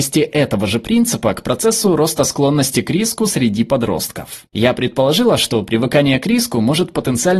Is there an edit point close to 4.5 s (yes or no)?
yes